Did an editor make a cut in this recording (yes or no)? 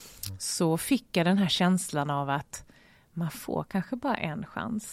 no